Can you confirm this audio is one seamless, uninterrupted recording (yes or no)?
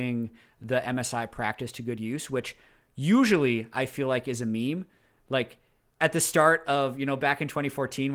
yes